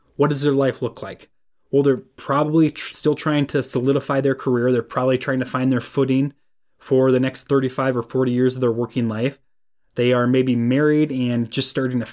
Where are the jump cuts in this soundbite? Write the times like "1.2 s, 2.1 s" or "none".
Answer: none